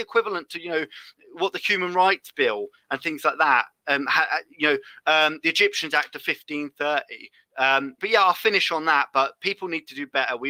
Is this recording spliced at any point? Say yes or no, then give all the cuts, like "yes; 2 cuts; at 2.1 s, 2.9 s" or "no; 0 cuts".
yes; 1 cut; at 8.0 s